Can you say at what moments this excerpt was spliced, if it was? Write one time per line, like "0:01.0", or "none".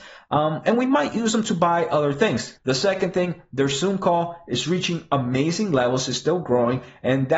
0:02.6